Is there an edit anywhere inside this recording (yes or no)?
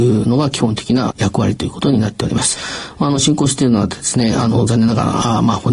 no